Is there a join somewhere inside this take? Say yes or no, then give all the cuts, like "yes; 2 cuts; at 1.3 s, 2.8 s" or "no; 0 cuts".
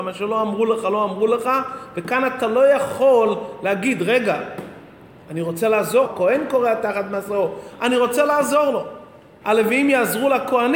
yes; 2 cuts; at 6.0 s, 9.4 s